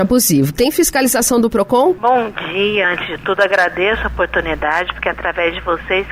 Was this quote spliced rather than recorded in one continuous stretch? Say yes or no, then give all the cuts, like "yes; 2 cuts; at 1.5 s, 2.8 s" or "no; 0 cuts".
no; 0 cuts